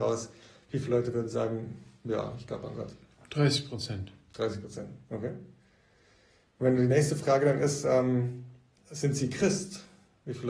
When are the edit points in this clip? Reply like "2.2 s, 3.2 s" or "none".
none